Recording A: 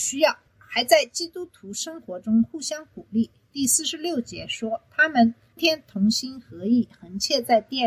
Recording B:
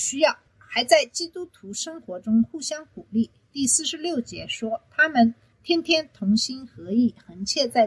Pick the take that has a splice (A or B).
A